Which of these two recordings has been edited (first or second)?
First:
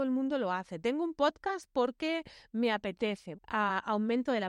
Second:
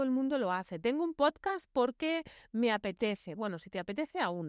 first